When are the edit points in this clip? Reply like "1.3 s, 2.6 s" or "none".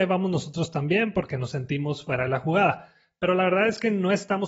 none